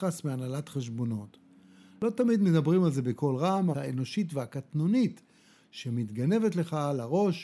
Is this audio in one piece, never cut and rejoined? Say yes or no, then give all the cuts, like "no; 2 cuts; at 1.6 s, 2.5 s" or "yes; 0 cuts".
no; 1 cut; at 3.7 s